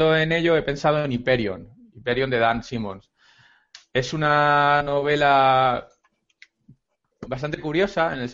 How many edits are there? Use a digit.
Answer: 0